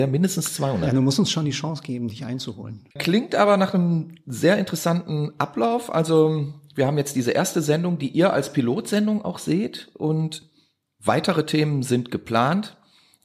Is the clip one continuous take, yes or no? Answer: no